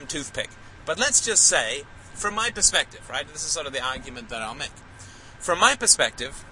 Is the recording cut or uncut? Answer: uncut